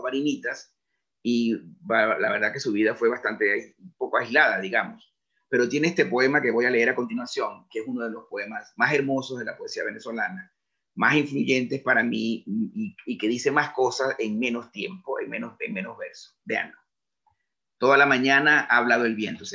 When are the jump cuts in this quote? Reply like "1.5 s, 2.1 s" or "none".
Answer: none